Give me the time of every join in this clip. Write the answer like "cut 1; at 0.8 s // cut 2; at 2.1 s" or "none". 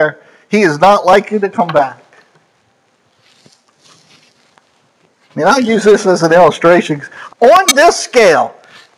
cut 1; at 7.3 s